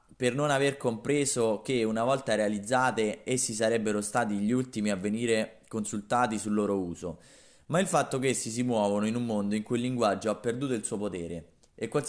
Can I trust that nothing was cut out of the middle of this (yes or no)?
yes